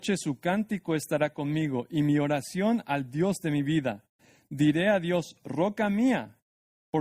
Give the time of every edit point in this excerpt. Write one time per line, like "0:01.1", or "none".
none